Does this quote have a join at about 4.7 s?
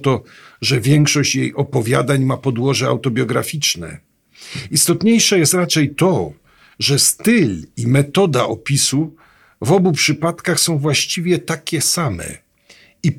no; 0 cuts

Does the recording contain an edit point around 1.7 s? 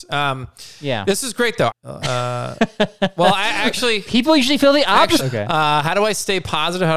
yes; 2 cuts; at 1.7 s, 5.2 s

